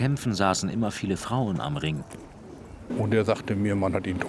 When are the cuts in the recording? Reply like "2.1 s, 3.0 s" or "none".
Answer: 2.9 s

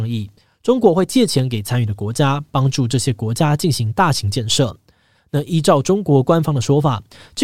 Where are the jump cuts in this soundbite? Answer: none

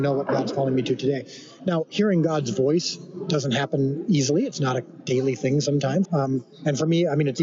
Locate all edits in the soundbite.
6.0 s

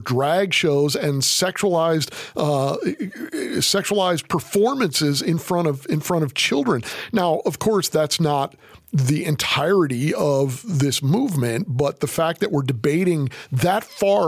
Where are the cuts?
none

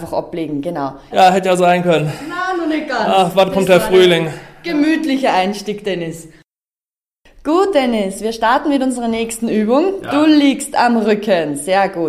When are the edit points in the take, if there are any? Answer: 1.1 s

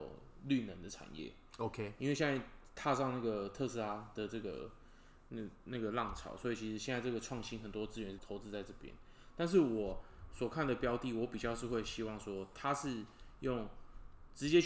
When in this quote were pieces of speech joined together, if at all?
8.2 s

